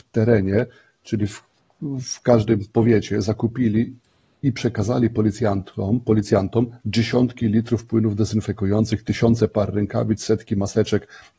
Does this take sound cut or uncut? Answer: uncut